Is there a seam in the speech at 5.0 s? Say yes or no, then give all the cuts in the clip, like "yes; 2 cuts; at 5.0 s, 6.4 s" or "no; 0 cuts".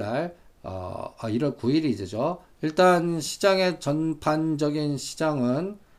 no; 1 cut; at 2.6 s